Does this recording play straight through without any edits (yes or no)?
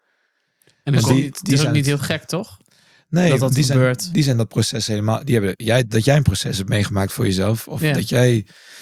yes